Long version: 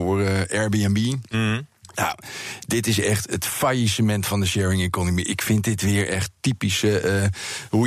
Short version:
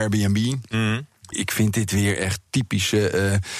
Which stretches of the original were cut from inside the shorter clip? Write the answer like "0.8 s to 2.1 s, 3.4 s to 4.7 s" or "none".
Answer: 1.9 s to 5.2 s